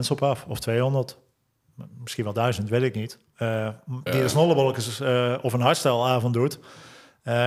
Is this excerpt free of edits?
no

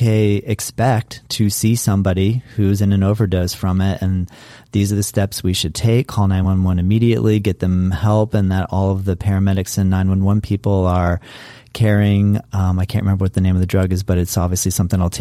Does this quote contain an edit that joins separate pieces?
no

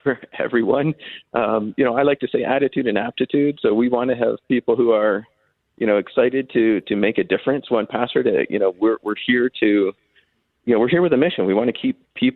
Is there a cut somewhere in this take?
no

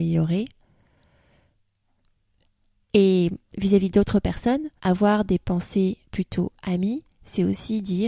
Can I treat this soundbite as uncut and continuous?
no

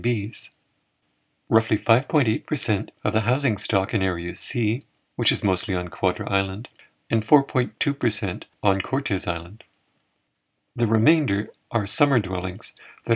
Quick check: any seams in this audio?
no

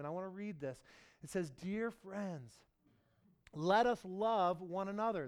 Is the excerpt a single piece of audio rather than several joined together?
yes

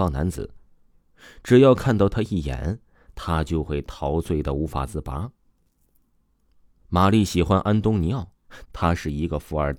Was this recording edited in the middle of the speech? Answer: yes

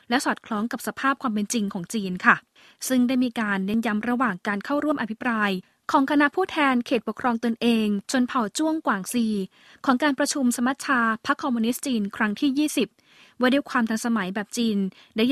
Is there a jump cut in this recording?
yes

